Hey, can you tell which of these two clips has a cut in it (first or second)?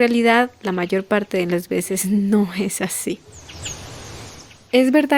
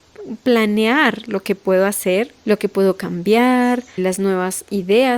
second